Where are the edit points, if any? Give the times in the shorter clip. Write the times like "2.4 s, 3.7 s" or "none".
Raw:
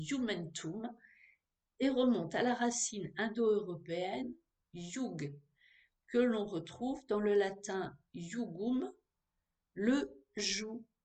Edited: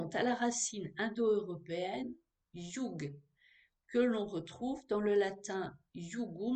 none